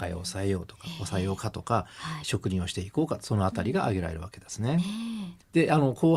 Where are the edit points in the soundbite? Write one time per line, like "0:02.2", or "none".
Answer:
0:02.2